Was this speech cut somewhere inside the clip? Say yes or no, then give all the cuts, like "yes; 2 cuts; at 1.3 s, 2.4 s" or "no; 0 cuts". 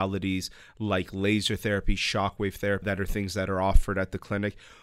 yes; 1 cut; at 2.8 s